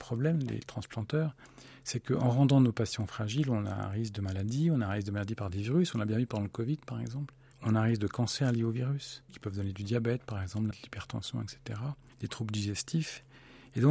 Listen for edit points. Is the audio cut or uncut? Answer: cut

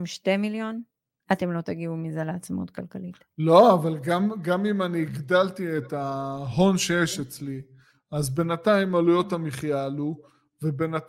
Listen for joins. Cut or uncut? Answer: uncut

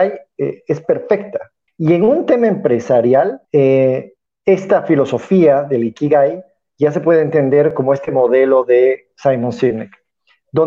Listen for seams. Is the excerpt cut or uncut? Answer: cut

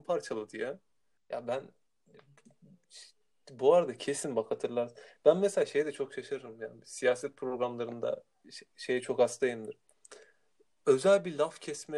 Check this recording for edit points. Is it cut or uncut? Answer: cut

